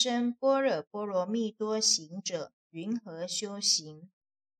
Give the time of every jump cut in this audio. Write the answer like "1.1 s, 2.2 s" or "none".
2.6 s